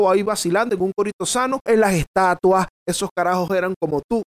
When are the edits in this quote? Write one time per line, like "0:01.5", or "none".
0:01.7
0:02.8